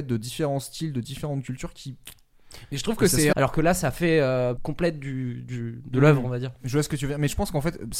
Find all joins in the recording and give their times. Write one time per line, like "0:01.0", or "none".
0:03.3
0:04.6